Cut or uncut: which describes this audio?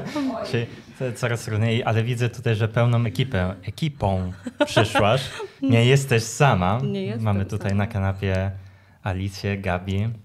cut